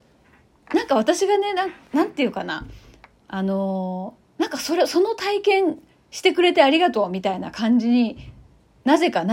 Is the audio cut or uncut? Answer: uncut